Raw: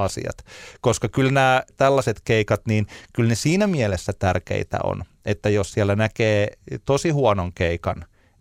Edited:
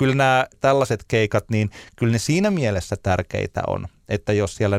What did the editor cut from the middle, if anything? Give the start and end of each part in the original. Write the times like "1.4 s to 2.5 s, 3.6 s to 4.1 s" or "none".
none